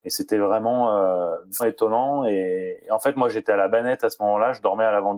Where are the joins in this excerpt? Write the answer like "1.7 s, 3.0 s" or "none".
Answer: 1.6 s

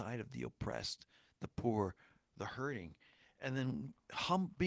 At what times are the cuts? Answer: none

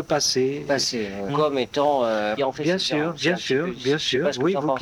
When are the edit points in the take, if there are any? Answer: 1.3 s, 2.4 s

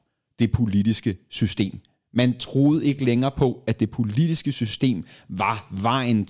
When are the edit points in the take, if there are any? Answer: none

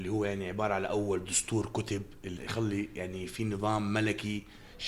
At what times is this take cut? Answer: 2.4 s

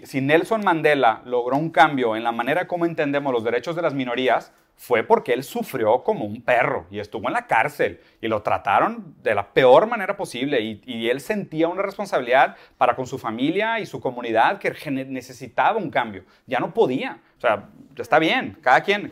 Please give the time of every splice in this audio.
17.4 s

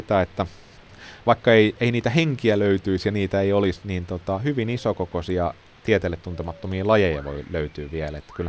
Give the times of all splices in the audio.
3.8 s

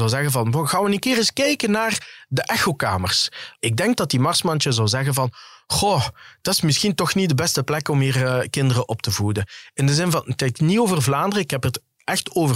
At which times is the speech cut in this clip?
3.6 s

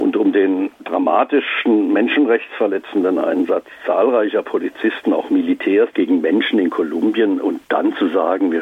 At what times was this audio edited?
5.9 s

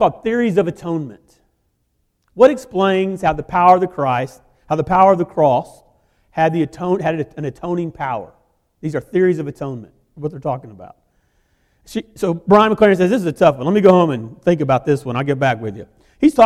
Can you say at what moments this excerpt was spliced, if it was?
none

